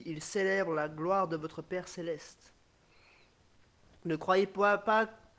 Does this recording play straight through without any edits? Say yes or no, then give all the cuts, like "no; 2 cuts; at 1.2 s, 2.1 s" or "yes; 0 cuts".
yes; 0 cuts